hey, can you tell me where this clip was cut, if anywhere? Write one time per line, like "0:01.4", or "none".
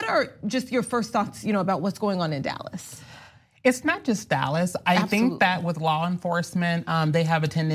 none